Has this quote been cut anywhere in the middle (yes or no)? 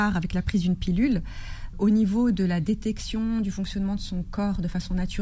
yes